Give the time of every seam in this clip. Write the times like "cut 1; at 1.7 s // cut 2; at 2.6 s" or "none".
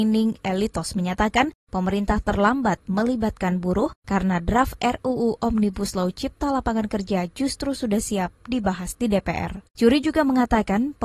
cut 1; at 9.7 s

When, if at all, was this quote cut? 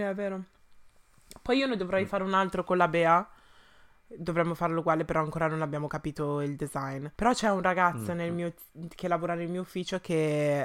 cut 1; at 7.1 s

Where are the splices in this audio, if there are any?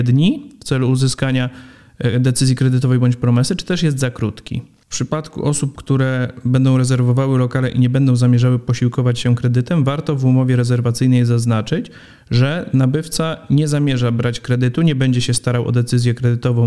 none

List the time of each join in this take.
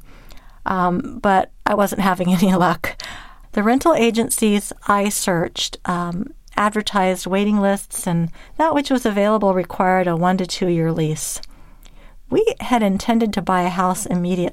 cut 1; at 3.4 s // cut 2; at 8.5 s

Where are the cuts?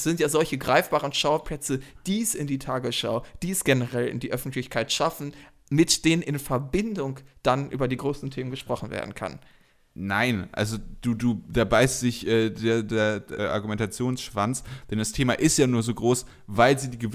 cut 1; at 13.4 s

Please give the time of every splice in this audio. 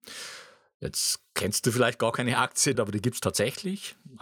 cut 1; at 2.7 s

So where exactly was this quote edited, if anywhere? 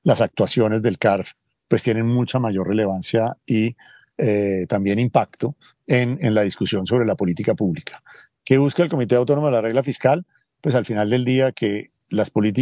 cut 1; at 6.2 s

